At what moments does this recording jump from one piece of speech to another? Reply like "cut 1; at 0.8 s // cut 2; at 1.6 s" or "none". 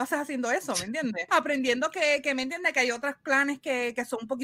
cut 1; at 1.3 s

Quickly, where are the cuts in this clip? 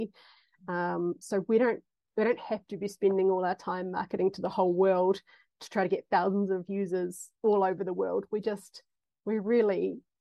none

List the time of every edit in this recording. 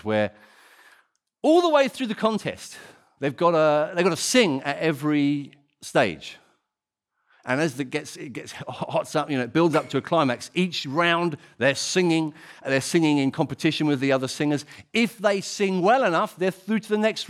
cut 1; at 3.2 s

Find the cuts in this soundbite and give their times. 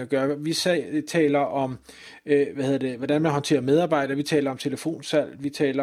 none

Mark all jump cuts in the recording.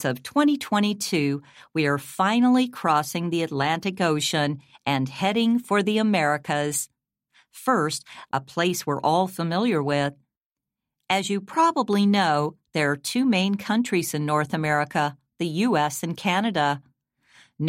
cut 1; at 8.3 s

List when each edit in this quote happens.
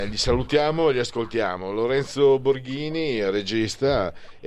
none

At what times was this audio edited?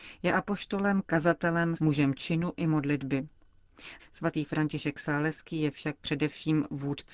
cut 1; at 1.8 s // cut 2; at 4.0 s

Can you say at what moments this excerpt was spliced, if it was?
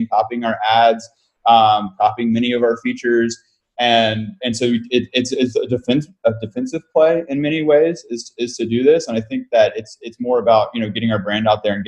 none

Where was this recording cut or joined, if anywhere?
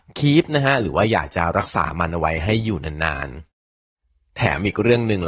cut 1; at 3.5 s

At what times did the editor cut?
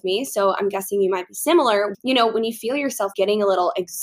cut 1; at 1.9 s // cut 2; at 3.1 s

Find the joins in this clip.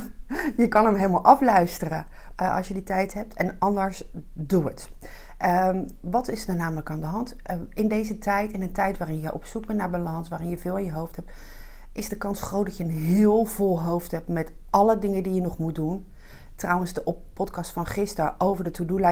cut 1; at 2.3 s

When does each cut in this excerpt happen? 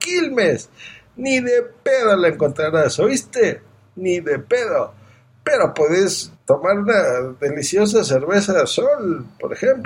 cut 1; at 6.3 s

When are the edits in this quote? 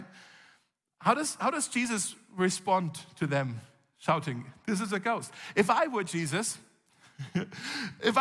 none

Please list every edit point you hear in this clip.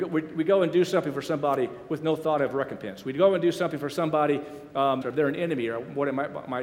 cut 1; at 5.0 s

